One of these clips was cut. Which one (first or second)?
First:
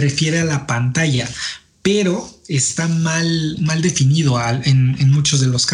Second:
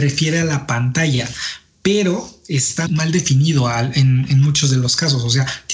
second